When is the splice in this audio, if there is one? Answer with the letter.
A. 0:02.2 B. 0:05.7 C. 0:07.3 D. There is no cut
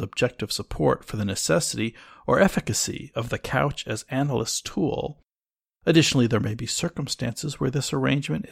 D